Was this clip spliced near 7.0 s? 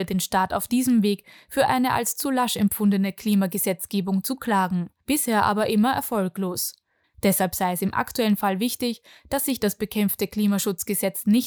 yes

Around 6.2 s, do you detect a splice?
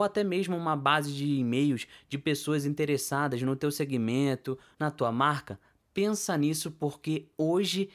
no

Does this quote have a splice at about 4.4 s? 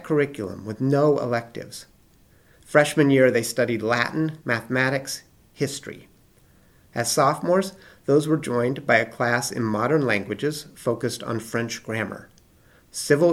yes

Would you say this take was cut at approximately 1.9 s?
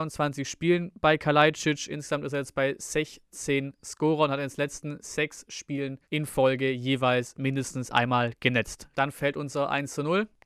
no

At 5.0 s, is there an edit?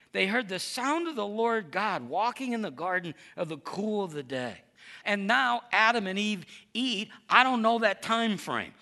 yes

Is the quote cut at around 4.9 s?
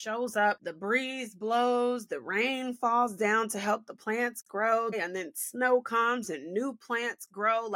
yes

